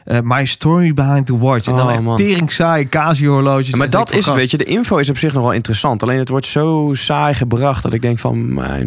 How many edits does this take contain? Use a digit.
0